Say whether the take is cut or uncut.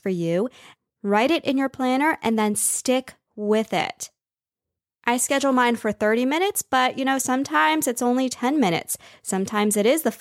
uncut